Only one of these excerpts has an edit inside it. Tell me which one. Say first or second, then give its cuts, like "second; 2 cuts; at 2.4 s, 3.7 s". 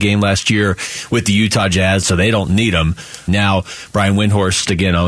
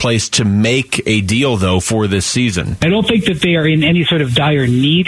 first; 2 cuts; at 2.0 s, 3.3 s